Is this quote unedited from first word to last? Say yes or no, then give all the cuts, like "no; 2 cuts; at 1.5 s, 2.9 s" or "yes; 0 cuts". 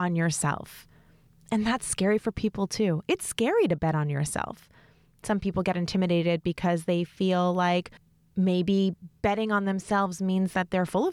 yes; 0 cuts